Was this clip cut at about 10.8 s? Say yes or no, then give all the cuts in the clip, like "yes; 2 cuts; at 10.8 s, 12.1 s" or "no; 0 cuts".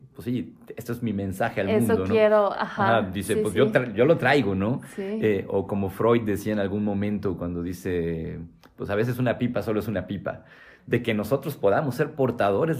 yes; 1 cut; at 10.8 s